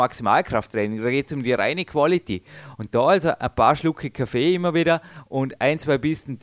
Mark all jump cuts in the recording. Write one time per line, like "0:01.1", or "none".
none